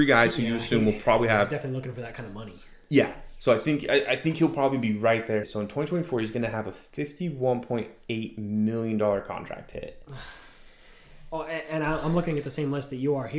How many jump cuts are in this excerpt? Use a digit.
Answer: 1